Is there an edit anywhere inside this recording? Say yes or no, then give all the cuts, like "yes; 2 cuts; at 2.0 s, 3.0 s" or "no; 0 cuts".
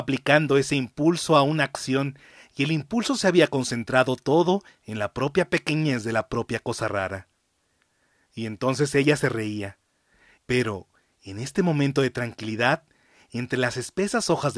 yes; 1 cut; at 10.4 s